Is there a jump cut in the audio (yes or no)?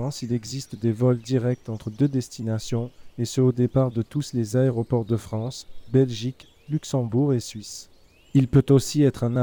no